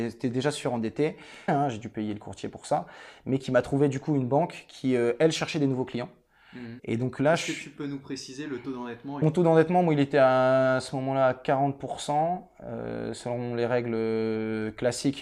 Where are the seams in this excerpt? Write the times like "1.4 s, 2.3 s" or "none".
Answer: 1.5 s, 6.8 s, 9.2 s